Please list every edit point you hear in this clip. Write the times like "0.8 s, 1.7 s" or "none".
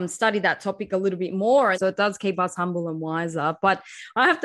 1.7 s